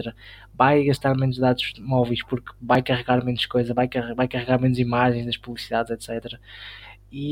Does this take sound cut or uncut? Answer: uncut